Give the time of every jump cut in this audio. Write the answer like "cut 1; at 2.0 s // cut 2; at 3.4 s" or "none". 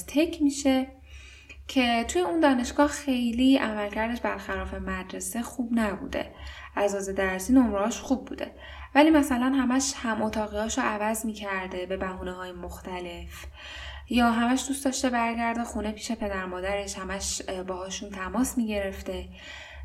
cut 1; at 6.7 s